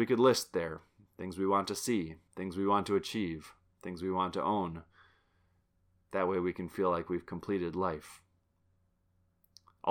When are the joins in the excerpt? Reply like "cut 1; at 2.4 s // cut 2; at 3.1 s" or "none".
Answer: cut 1; at 2.3 s